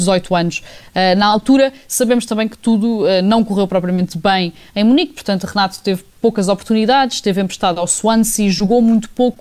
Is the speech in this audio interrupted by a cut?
no; 0 cuts

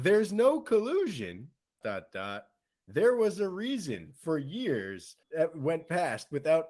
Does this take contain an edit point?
yes; 2 cuts; at 1.8 s, 5.2 s

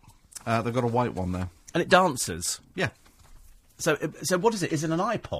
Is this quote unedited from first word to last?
yes; 0 cuts

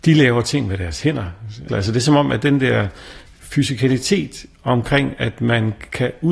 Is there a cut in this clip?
yes; 1 cut; at 1.7 s

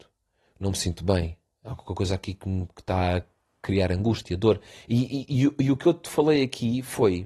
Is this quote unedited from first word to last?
no; 1 cut; at 4.8 s

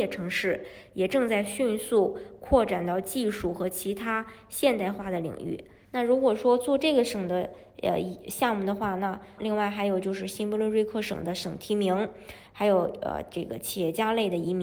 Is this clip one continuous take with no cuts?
no; 3 cuts; at 5.8 s, 9.4 s, 12.5 s

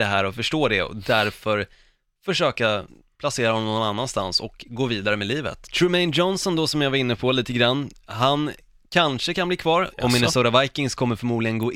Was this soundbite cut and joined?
yes; 2 cuts; at 5.6 s, 9.9 s

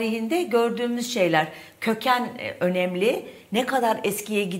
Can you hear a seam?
no; 0 cuts

